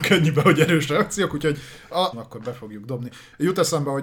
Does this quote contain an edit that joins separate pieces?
yes; 1 cut; at 2.1 s

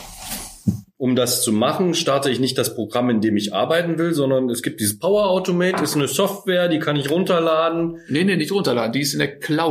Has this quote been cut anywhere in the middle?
no; 0 cuts

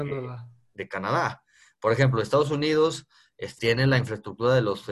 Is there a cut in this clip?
yes; 1 cut; at 3.6 s

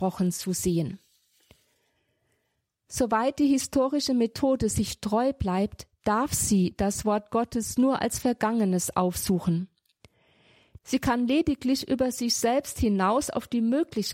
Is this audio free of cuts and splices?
no; 1 cut; at 10.8 s

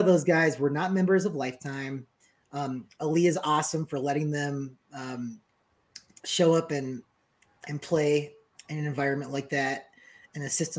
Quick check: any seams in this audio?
no; 0 cuts

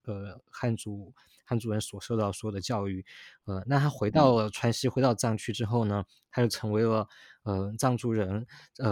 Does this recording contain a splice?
no; 0 cuts

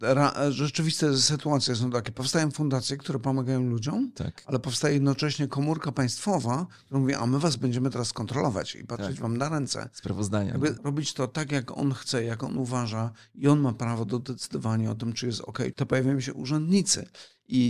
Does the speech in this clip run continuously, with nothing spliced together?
no; 2 cuts; at 10.8 s, 15.7 s

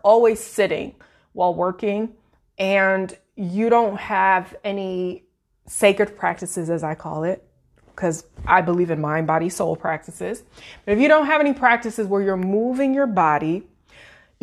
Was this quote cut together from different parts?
no; 0 cuts

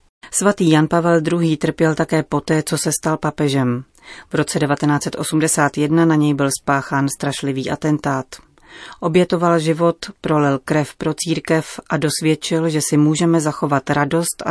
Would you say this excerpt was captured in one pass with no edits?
yes; 0 cuts

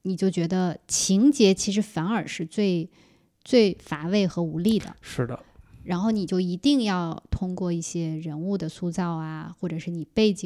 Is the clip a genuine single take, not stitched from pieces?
yes; 0 cuts

